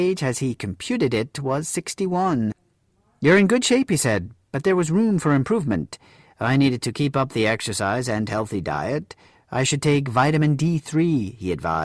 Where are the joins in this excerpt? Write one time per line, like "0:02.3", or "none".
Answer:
none

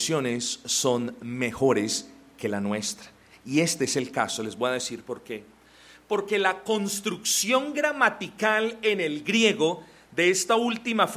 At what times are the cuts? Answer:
none

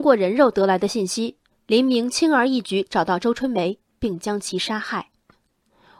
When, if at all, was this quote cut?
none

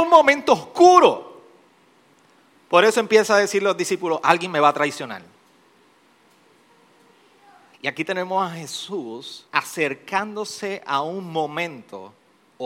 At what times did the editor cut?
0:07.7
0:09.5

